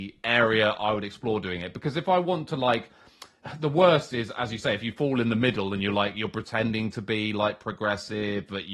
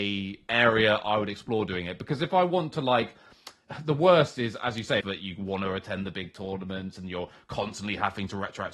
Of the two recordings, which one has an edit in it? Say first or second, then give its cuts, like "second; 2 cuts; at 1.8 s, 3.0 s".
second; 1 cut; at 5.0 s